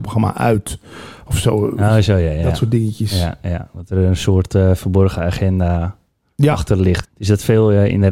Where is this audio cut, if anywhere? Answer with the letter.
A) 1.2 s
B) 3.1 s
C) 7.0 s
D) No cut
C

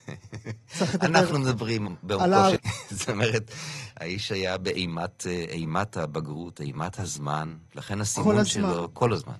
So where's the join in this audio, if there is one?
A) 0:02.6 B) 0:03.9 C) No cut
A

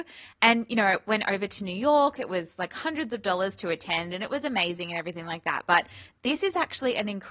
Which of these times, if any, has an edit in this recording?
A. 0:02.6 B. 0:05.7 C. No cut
C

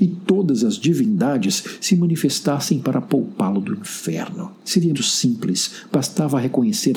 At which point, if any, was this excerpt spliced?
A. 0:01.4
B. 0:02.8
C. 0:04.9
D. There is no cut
C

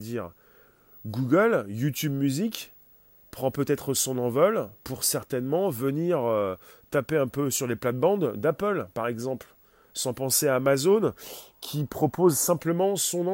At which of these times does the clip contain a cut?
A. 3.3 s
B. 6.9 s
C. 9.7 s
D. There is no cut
D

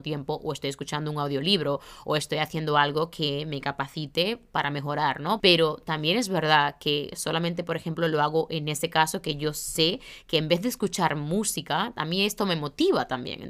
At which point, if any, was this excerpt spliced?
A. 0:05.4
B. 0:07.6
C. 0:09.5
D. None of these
A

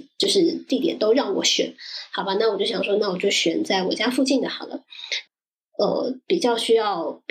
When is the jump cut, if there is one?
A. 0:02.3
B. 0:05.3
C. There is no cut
B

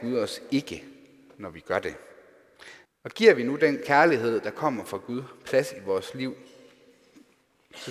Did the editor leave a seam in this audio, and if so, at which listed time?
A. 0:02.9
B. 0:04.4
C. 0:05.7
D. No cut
A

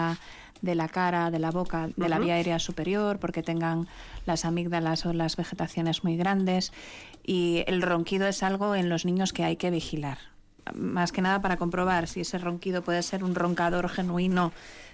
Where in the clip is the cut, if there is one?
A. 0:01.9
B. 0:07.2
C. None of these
A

